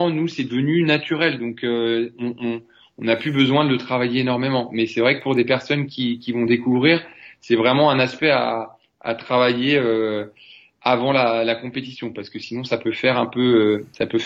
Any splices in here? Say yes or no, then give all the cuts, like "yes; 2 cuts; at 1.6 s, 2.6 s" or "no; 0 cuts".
no; 0 cuts